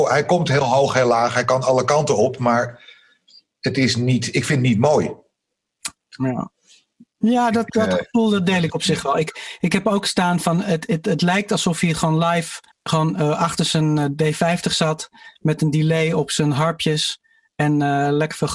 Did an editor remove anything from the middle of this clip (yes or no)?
yes